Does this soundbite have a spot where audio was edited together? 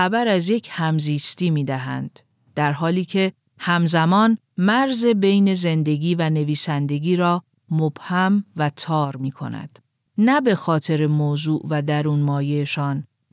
yes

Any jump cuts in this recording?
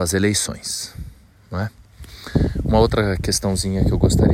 no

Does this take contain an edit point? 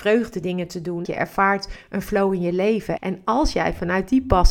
yes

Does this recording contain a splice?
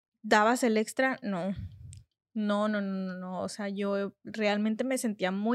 no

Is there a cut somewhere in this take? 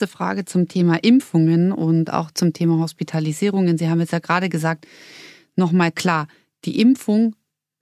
no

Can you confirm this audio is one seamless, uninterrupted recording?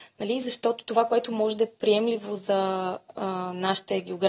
yes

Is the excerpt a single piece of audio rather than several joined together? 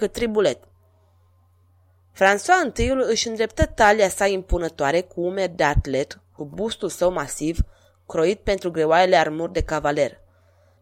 yes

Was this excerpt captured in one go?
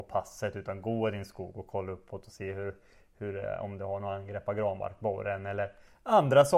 yes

